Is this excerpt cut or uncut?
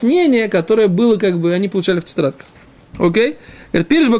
uncut